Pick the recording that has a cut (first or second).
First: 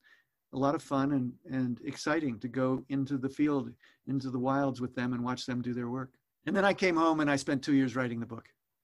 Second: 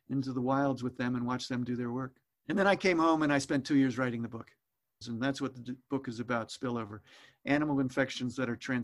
second